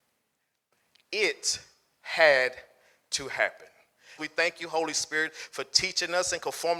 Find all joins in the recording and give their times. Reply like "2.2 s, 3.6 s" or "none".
4.2 s

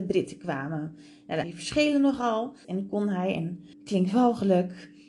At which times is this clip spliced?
1.4 s, 2.6 s, 3.7 s

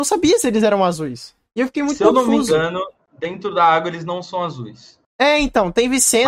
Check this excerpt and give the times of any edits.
none

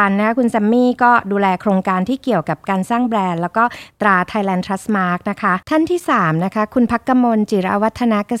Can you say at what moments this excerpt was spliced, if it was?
5.6 s

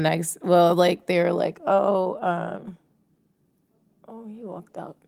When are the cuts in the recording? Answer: none

